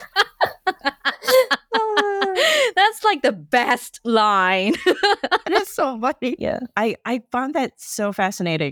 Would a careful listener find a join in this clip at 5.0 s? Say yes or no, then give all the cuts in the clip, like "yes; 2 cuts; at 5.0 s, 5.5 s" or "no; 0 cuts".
no; 1 cut; at 6.4 s